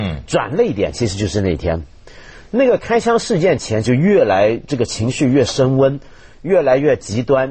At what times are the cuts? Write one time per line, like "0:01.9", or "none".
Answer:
0:03.8